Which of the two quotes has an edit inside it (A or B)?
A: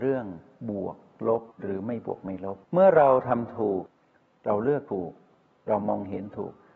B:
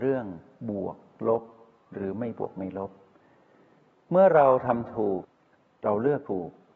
A